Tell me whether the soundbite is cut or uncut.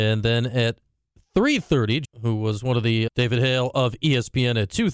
cut